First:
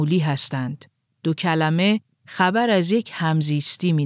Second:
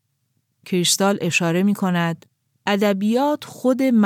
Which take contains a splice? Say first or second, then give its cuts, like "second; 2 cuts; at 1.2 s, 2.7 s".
first; 1 cut; at 1.1 s